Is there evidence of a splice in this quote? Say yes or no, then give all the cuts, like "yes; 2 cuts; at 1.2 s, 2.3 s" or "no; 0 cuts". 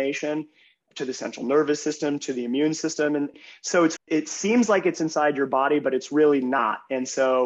yes; 1 cut; at 4.0 s